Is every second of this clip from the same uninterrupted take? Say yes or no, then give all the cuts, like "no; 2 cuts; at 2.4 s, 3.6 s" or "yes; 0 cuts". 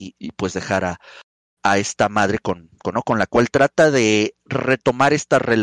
no; 1 cut; at 2.9 s